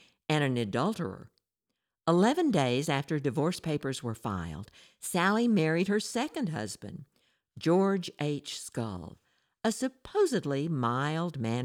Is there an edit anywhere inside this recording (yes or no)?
no